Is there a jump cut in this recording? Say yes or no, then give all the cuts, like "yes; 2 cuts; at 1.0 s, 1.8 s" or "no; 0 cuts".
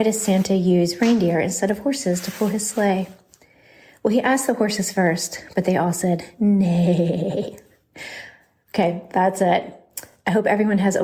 no; 0 cuts